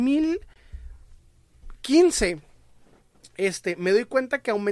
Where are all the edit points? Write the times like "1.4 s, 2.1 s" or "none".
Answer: none